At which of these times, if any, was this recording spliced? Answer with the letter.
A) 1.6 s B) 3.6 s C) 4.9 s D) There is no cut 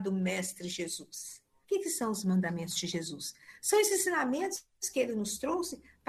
A